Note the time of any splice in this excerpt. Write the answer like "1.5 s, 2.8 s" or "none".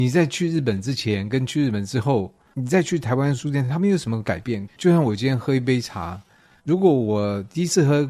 4.7 s